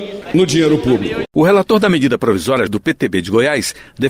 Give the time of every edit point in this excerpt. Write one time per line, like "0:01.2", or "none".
0:02.7